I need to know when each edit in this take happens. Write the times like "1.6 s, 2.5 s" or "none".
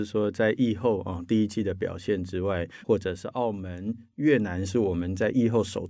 2.8 s